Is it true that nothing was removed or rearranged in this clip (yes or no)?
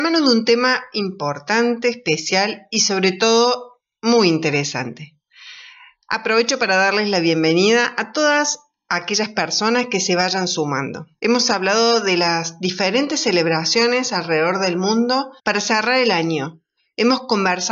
no